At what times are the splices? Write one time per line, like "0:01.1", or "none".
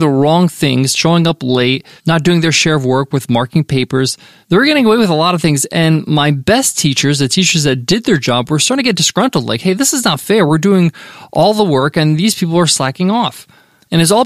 none